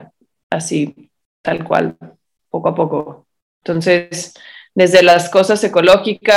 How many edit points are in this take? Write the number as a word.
zero